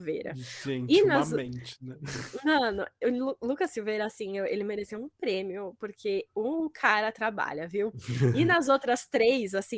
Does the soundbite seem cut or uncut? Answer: uncut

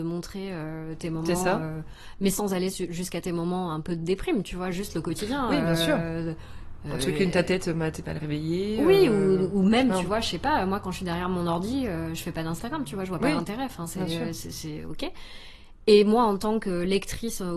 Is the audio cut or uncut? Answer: uncut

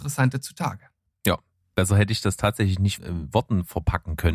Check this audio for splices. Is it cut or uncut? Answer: uncut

